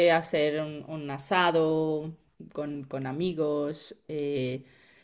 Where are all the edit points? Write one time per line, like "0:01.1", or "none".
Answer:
none